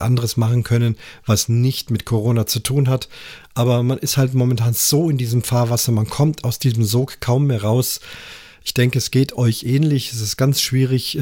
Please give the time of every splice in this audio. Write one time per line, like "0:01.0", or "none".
none